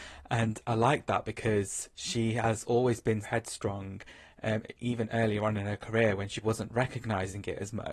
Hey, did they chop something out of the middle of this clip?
yes; 2 cuts; at 3.2 s, 6.4 s

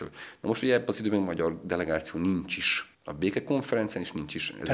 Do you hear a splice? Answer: yes; 1 cut; at 2.9 s

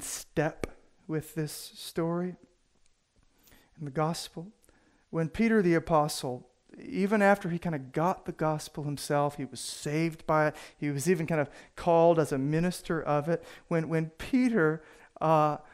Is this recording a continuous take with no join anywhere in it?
yes; 0 cuts

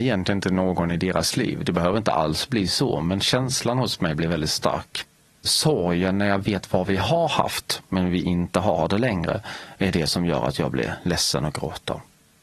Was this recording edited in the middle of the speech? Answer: no; 0 cuts

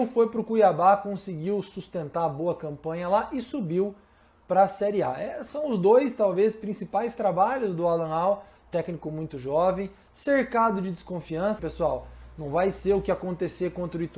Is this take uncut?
no; 1 cut; at 11.6 s

